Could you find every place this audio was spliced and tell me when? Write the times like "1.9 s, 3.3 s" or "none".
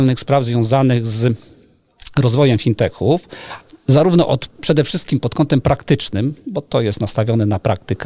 4.6 s